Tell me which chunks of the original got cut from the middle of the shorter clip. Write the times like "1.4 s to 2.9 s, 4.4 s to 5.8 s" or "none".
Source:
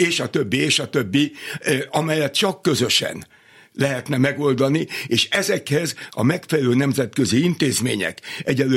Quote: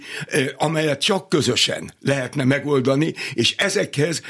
3.3 s to 3.7 s